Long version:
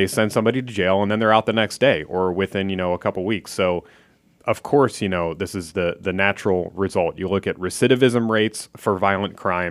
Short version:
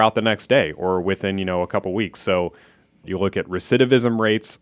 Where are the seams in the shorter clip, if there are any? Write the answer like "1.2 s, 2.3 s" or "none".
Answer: 3.0 s